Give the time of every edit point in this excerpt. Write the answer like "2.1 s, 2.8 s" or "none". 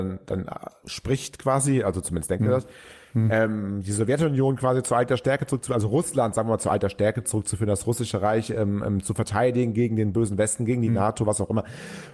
none